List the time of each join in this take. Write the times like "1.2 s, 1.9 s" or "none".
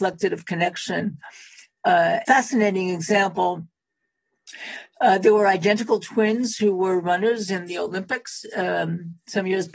2.2 s